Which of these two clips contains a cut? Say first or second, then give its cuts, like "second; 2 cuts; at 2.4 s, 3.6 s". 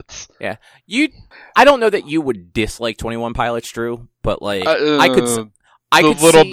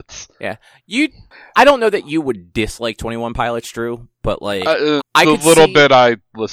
second; 1 cut; at 5.0 s